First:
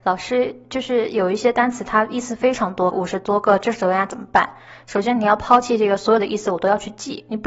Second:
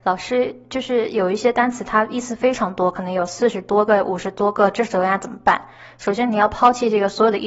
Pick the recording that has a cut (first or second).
first